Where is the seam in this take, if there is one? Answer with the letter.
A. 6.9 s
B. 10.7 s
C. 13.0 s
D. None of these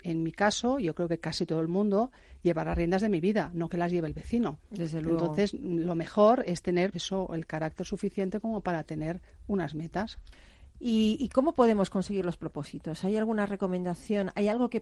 A